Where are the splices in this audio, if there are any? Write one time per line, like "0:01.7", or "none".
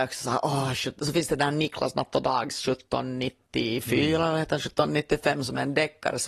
none